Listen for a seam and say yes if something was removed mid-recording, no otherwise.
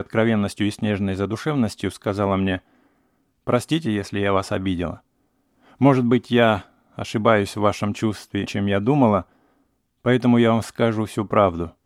yes